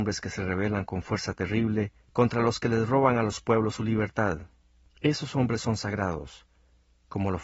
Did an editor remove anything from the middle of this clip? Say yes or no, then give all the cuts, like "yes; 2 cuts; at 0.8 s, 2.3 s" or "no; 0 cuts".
yes; 1 cut; at 2.0 s